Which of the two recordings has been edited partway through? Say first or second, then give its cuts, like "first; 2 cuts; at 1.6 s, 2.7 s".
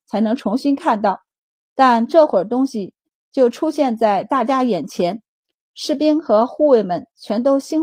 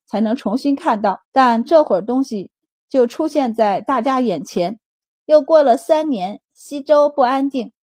second; 2 cuts; at 1.2 s, 5.0 s